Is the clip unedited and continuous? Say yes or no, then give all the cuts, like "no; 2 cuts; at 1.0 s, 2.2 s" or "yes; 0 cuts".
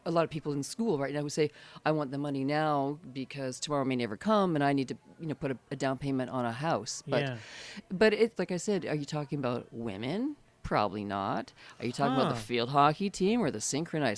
no; 1 cut; at 8.4 s